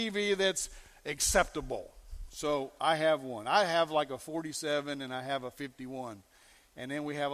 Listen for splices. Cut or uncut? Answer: uncut